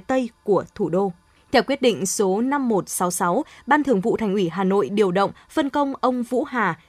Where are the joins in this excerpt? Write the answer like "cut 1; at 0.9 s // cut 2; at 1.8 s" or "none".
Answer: cut 1; at 1.4 s